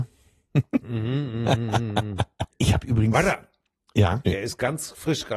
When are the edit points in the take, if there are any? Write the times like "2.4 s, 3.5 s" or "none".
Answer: 2.5 s, 4.2 s